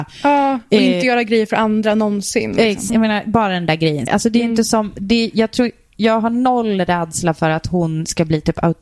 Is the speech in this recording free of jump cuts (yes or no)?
no